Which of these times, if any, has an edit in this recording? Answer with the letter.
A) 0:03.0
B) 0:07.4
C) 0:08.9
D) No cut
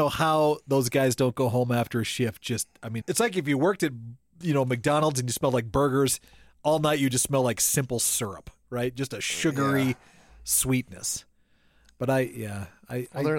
A